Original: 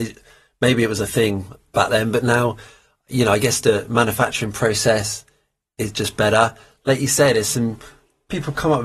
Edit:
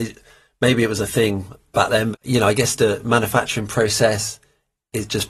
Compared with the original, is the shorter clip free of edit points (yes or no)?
no